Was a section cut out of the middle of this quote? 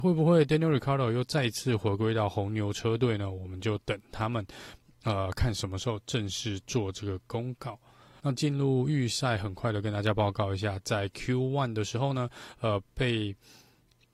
yes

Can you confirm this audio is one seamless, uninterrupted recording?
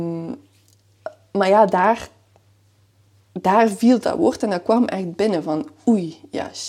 yes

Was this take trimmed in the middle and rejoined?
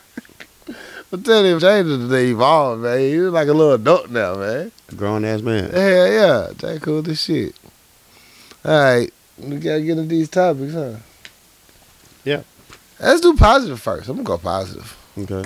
yes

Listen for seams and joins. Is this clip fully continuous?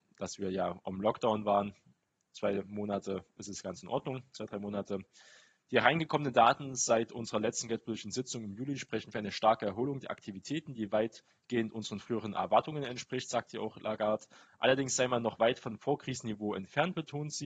yes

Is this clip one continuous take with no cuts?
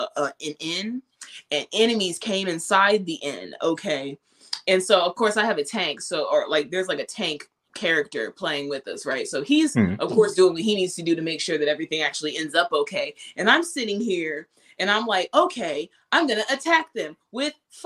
yes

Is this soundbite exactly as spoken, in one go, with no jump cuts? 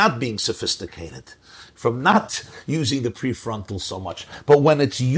yes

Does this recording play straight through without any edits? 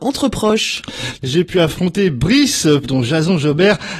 no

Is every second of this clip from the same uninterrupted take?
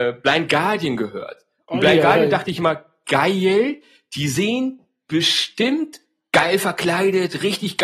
yes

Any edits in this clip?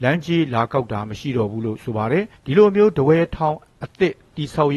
yes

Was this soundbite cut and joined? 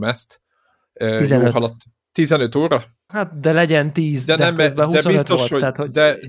yes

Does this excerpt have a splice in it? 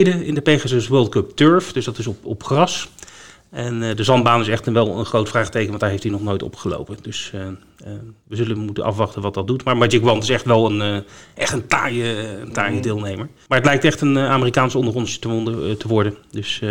no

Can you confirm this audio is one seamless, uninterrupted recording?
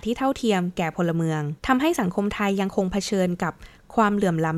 no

